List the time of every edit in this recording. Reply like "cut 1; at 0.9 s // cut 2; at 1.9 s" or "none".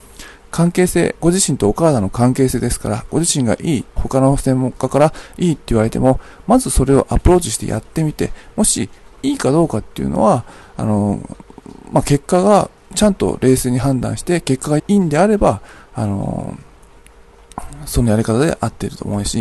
cut 1; at 4.0 s // cut 2; at 14.8 s